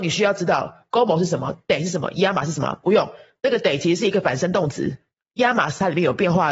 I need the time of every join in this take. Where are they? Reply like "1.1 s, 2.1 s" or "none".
none